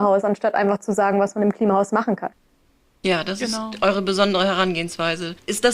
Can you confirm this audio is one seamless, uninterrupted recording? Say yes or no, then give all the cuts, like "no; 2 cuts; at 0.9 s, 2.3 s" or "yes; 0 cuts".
yes; 0 cuts